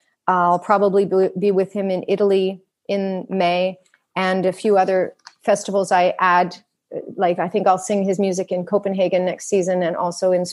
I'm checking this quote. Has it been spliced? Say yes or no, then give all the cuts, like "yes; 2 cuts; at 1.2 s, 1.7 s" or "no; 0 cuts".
no; 0 cuts